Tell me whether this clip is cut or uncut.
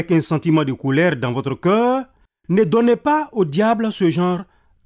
uncut